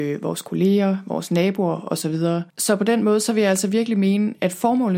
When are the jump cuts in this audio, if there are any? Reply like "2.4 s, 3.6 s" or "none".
2.5 s